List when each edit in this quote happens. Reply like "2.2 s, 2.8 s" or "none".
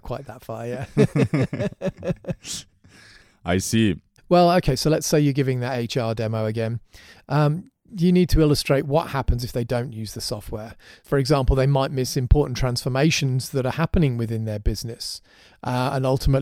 4.2 s